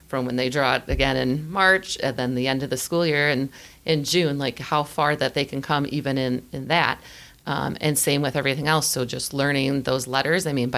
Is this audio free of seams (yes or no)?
yes